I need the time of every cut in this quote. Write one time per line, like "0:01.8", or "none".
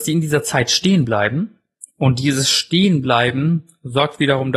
none